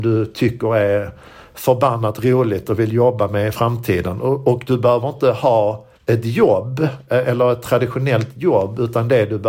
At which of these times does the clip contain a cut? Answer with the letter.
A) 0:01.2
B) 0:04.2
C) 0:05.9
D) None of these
C